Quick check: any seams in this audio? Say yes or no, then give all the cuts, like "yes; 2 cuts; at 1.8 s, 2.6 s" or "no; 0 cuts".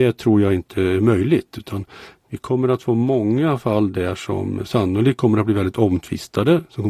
no; 0 cuts